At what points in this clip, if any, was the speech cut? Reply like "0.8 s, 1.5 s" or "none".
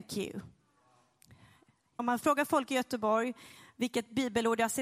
2.0 s